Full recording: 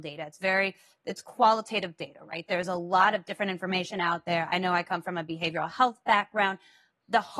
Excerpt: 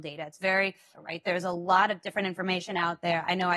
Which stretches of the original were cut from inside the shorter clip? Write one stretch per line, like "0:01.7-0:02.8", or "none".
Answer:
0:00.9-0:02.2

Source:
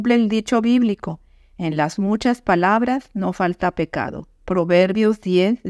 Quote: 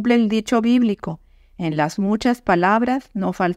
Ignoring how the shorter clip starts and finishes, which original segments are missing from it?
none

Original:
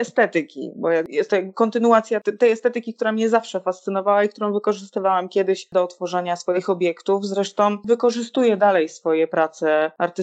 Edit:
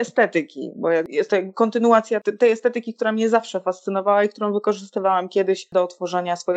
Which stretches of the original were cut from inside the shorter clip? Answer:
none

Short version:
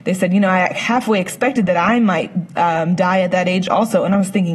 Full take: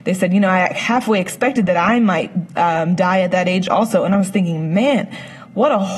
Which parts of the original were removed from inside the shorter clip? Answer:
none

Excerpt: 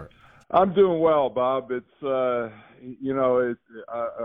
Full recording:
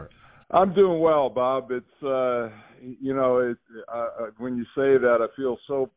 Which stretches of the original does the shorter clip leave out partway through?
none

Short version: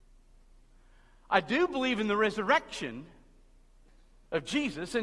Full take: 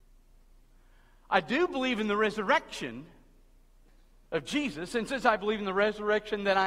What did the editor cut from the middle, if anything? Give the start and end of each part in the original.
none

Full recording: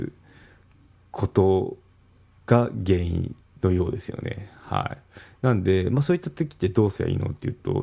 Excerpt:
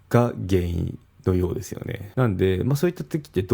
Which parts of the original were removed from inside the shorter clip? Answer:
0:04.5-0:05.4

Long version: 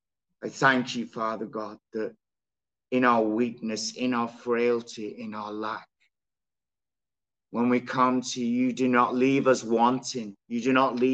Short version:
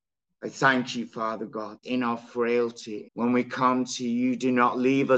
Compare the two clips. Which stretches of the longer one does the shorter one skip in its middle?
0:01.8-0:03.9
0:05.2-0:07.4

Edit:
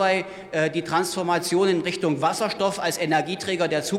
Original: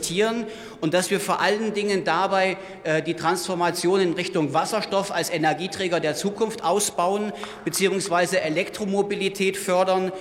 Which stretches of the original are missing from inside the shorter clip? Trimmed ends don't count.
none

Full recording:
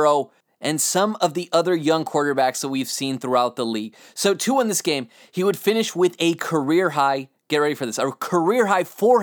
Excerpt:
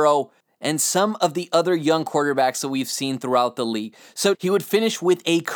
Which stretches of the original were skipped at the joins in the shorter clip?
0:04.3-0:05.3

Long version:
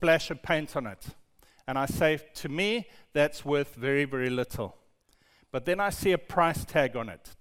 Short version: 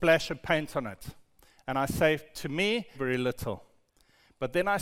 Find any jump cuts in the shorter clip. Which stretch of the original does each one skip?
0:02.9-0:04.1

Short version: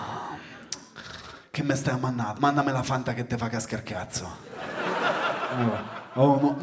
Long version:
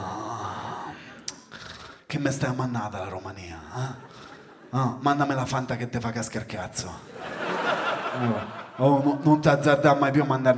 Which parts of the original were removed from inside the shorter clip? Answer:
0:02.9-0:05.0

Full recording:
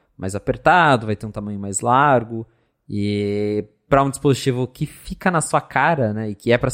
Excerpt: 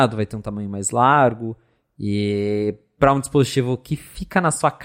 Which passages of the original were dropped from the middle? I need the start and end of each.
none

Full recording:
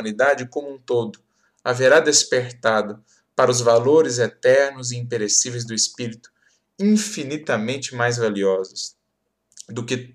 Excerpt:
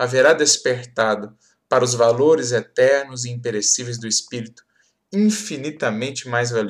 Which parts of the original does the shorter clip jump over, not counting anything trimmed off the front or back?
none

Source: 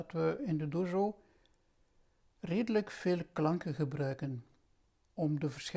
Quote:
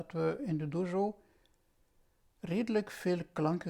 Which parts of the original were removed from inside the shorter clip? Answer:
none

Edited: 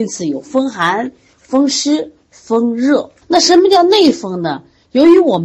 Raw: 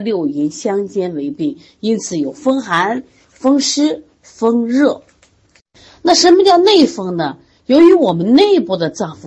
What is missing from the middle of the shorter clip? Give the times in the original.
0:05.1-0:06.0

